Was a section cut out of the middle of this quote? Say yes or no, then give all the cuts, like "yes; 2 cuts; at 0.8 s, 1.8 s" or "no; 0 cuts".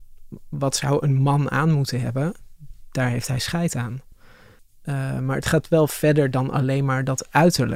no; 0 cuts